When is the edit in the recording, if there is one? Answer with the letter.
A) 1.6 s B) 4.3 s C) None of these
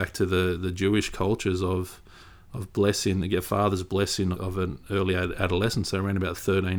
B